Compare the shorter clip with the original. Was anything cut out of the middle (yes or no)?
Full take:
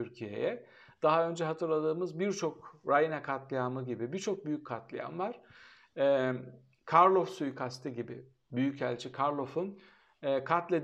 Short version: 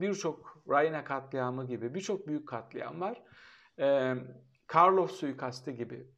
no